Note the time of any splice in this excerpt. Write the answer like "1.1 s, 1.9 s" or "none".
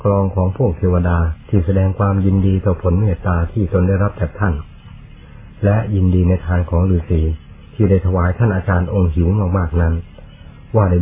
1.4 s